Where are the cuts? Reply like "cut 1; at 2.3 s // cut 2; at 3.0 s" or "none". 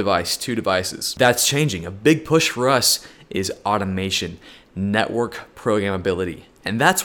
none